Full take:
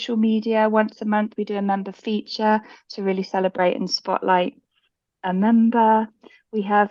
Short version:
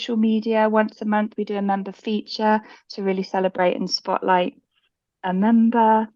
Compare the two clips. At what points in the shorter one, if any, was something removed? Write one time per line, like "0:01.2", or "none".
none